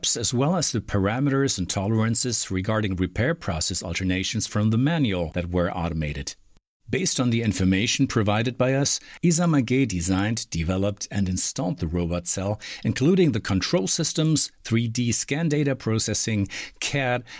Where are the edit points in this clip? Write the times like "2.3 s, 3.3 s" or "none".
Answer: none